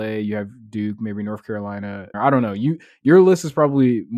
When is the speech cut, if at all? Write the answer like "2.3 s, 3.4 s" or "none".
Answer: 2.1 s